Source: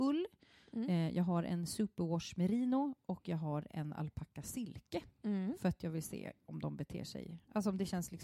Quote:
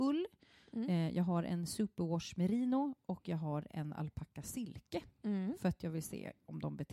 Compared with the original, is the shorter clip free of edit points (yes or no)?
yes